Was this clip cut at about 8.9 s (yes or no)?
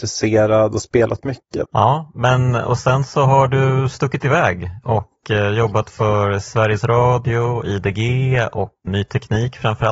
yes